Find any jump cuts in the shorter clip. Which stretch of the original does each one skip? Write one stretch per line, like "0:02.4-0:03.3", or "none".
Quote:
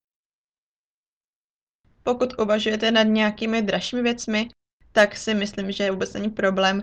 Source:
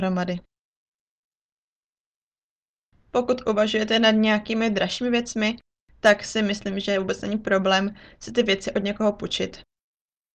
none